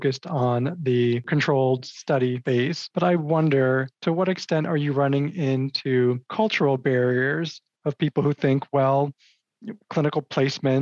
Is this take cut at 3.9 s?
yes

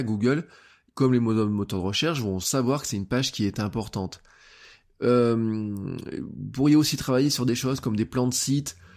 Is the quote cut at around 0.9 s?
no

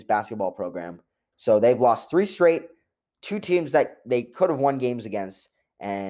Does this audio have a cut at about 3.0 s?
no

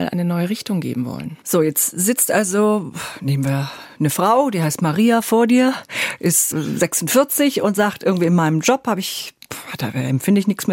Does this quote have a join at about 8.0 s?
no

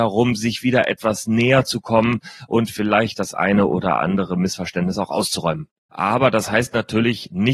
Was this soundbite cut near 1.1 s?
no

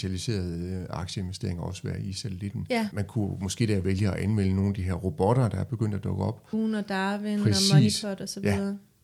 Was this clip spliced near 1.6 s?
no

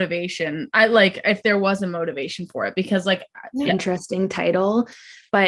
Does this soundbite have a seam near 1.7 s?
no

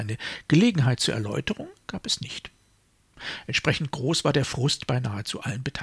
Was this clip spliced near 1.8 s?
yes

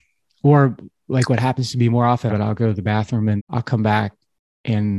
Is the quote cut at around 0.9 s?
no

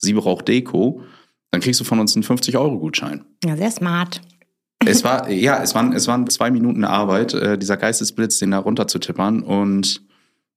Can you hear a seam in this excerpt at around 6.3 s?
yes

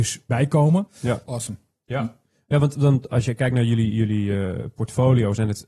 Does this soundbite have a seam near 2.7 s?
no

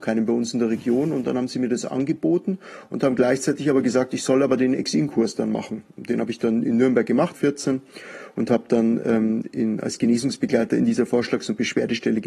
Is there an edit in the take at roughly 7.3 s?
yes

